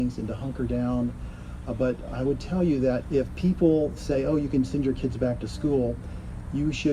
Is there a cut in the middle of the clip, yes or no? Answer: yes